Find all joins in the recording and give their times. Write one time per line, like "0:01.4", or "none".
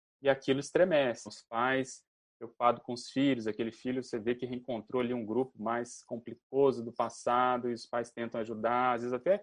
0:01.3